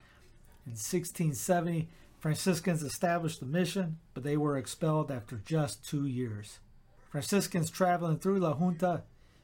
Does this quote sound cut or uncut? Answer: cut